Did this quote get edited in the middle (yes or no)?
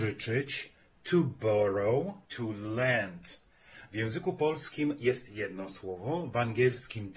yes